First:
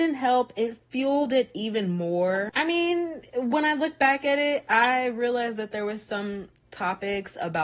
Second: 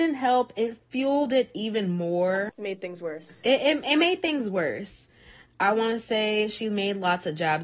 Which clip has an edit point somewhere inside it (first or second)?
first